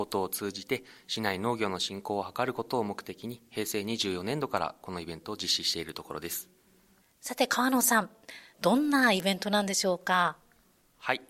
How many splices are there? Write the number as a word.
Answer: two